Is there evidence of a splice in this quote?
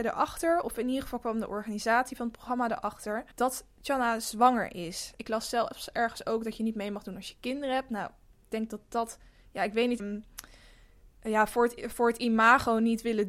yes; 3 cuts; at 3.3 s, 5.1 s, 10.0 s

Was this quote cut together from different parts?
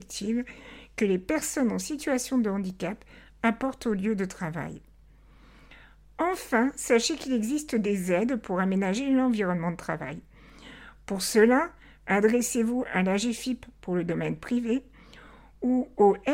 no; 0 cuts

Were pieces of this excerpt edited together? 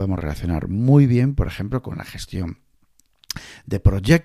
no; 0 cuts

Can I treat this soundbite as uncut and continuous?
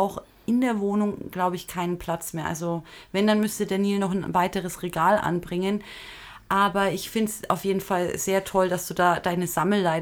yes; 0 cuts

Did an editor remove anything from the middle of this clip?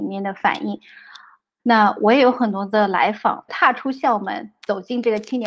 yes; 2 cuts; at 1.6 s, 3.5 s

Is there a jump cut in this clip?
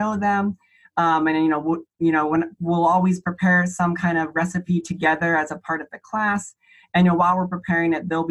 no; 0 cuts

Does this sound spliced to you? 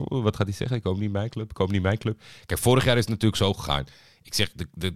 no; 0 cuts

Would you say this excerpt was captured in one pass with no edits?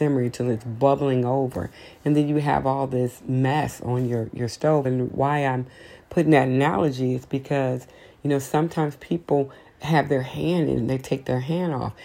yes; 0 cuts

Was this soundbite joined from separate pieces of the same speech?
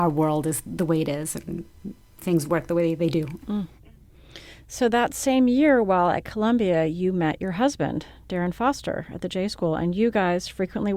yes; 1 cut; at 3.4 s

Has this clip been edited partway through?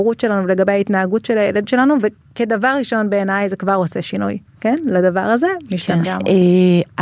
yes; 2 cuts; at 4.5 s, 6.0 s

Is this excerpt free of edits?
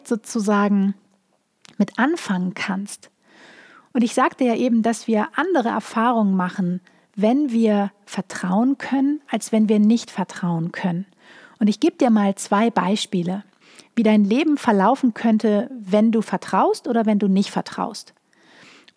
yes; 0 cuts

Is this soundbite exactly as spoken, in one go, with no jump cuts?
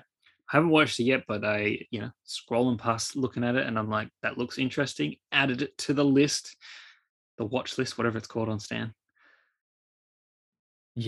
yes; 0 cuts

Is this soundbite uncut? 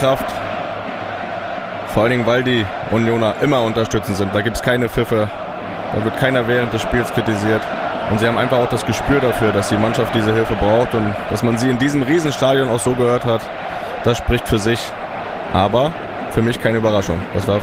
yes; 0 cuts

